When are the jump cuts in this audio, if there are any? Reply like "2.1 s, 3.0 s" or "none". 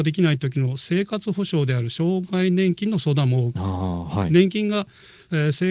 none